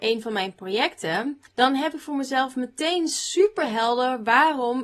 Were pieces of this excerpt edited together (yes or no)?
yes